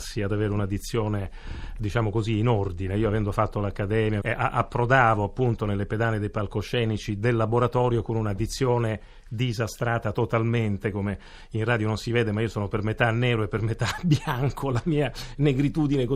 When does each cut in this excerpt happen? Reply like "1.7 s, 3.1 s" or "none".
4.2 s